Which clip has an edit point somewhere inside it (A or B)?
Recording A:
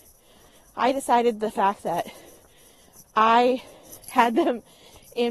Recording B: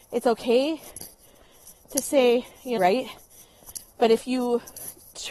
B